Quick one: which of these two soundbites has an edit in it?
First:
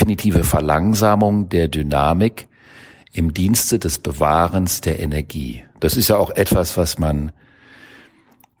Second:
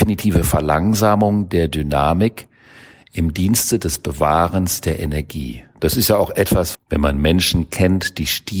second; 1 cut; at 6.7 s

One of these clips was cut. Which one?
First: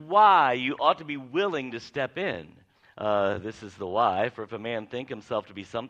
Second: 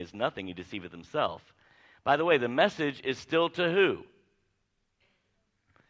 first; 1 cut; at 2.8 s

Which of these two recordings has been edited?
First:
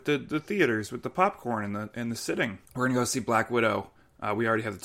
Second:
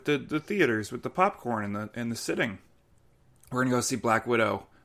first; 1 cut; at 2.7 s

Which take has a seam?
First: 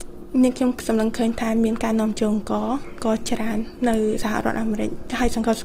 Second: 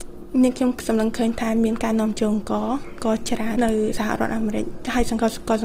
second; 1 cut; at 3.6 s

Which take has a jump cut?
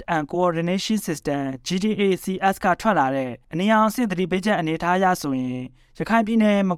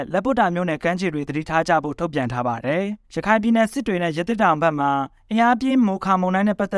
second; 1 cut; at 3.0 s

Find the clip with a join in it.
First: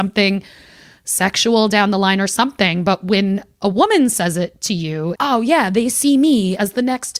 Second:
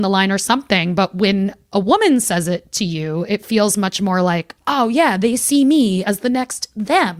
first; 1 cut; at 5.2 s

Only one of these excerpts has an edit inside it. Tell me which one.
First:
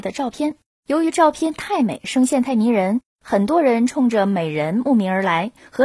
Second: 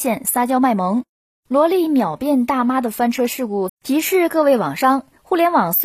second; 2 cuts; at 1.3 s, 3.7 s

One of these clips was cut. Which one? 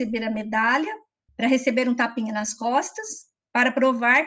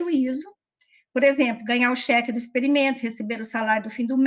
first; 1 cut; at 1.3 s

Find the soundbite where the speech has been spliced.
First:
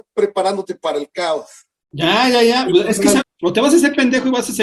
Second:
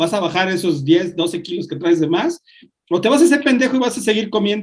first; 1 cut; at 3.2 s

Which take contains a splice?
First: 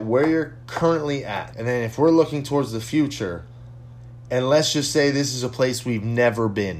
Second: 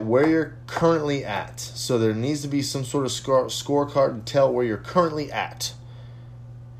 first; 1 cut; at 1.5 s

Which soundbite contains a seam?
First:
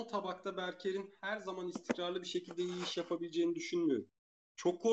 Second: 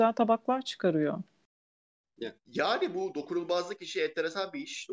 second; 1 cut; at 2.4 s

